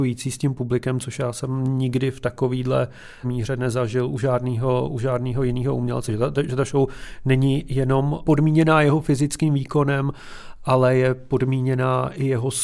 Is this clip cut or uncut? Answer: uncut